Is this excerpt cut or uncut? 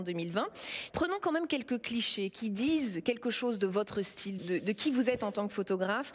cut